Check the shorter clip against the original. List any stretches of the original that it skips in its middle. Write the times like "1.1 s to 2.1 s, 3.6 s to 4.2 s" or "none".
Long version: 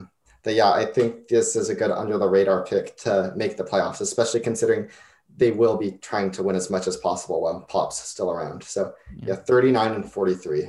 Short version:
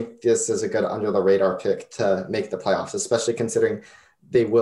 none